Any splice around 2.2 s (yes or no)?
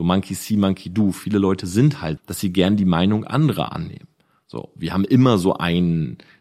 yes